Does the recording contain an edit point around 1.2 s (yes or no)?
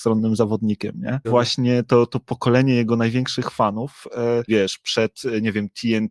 yes